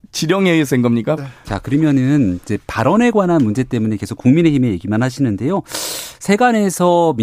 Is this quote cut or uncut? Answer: cut